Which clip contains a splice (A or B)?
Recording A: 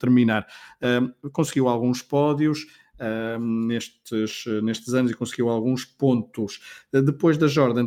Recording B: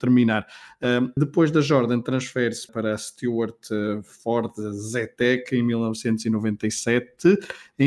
B